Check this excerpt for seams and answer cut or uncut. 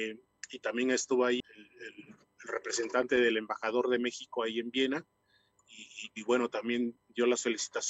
cut